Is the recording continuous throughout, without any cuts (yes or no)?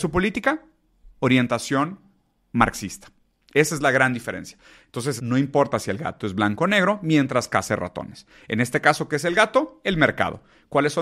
no